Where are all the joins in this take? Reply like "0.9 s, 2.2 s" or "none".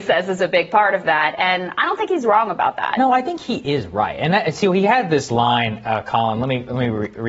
none